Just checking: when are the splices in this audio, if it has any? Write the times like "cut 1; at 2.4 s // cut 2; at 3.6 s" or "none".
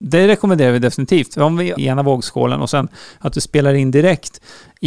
cut 1; at 1.8 s